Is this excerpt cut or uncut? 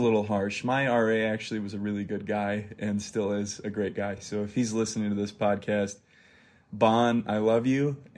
uncut